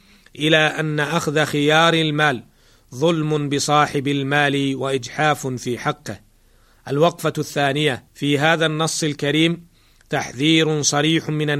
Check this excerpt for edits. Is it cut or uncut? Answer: cut